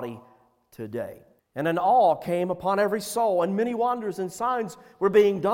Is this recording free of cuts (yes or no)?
no